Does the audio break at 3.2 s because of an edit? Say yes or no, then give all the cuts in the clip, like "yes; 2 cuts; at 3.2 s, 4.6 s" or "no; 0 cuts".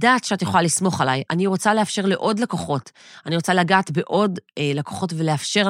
no; 1 cut; at 4.5 s